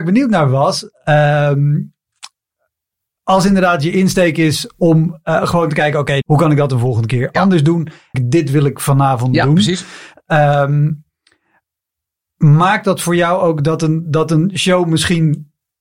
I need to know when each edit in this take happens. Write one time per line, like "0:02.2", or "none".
0:06.2
0:08.1